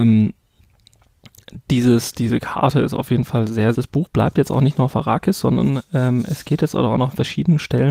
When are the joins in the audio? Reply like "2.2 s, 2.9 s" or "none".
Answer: 3.7 s